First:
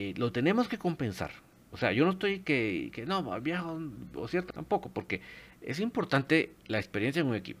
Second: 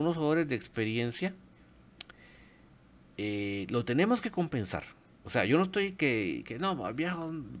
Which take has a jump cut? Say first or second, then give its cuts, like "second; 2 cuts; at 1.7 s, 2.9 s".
first; 1 cut; at 4.5 s